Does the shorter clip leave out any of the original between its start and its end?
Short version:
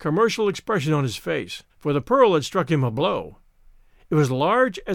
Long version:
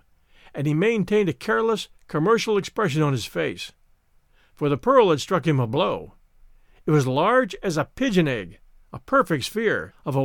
yes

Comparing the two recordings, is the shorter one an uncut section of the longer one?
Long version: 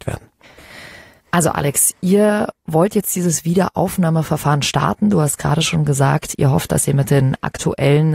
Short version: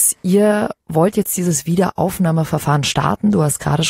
yes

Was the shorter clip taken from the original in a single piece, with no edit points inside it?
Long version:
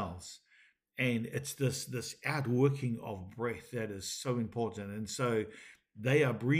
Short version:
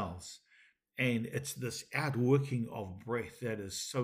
no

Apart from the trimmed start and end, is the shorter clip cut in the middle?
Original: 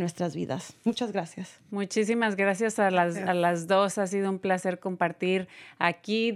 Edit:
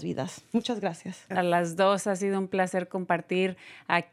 yes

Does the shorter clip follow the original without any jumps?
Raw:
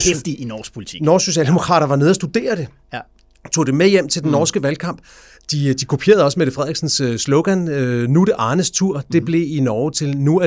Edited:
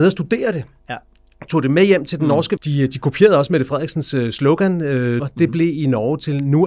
no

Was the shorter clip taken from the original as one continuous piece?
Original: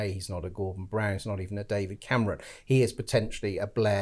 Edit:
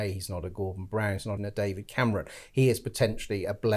no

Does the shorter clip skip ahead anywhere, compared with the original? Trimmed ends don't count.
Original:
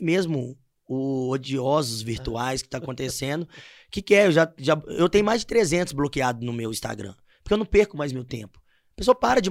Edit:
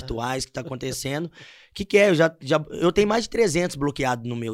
no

